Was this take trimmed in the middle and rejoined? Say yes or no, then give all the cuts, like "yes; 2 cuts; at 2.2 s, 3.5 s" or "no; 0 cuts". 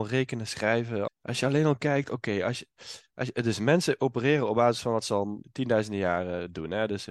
yes; 2 cuts; at 1.1 s, 5.4 s